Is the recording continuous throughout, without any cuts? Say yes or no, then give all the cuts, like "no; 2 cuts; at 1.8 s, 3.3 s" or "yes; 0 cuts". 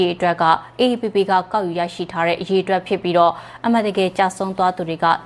yes; 0 cuts